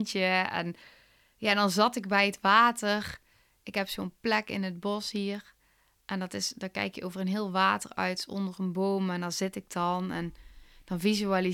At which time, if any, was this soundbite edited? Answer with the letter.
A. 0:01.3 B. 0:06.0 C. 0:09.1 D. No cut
D